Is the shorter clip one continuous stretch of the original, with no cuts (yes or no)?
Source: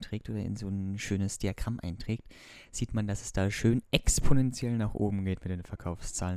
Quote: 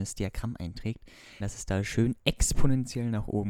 no